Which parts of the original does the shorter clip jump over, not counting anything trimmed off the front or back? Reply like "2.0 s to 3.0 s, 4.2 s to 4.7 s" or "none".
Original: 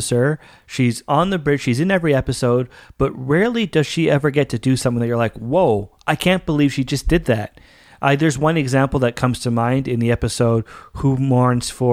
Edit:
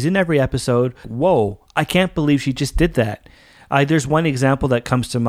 2.8 s to 5.3 s